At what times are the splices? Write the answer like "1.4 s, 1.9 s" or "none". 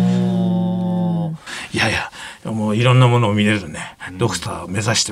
1.5 s